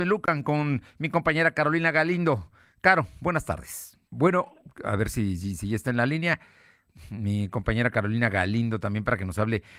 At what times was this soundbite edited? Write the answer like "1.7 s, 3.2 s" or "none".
4.0 s